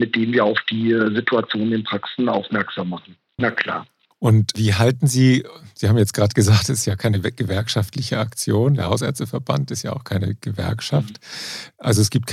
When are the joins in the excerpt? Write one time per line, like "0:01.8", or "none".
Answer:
0:03.4